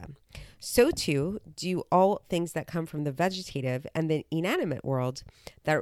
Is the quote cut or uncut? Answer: uncut